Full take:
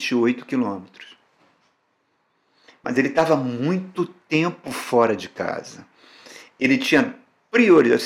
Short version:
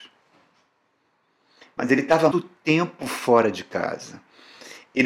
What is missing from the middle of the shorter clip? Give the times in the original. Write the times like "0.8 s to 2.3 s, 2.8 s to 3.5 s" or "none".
3.4 s to 4.0 s